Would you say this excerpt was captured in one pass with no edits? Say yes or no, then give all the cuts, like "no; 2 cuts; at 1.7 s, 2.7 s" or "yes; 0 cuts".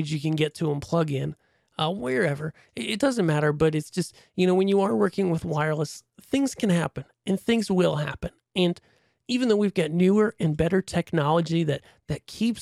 yes; 0 cuts